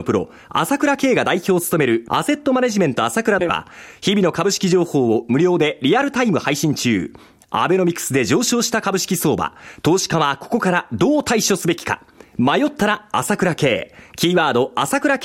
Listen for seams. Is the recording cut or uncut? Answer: uncut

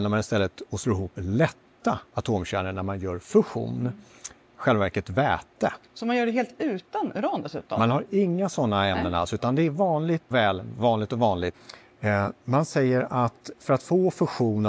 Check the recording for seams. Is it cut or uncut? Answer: cut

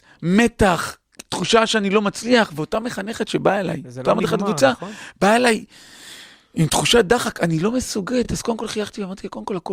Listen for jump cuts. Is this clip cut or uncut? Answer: uncut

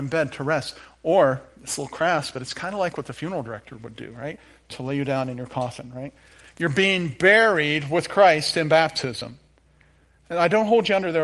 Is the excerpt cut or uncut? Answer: uncut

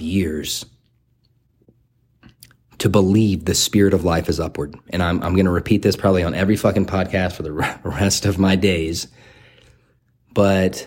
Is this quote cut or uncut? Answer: uncut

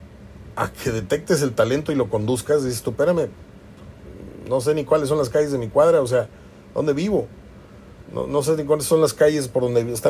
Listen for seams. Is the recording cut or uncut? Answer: uncut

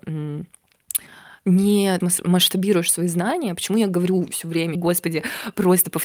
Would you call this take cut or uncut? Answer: cut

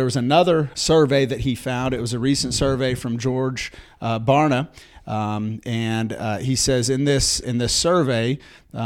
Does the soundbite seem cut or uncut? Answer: cut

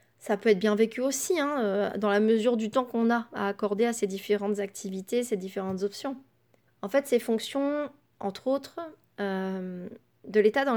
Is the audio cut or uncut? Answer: cut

